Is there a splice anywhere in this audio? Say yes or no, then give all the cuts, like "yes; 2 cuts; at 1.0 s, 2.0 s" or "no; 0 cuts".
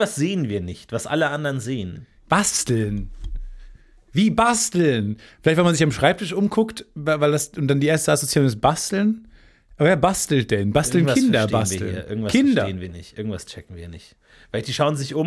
no; 0 cuts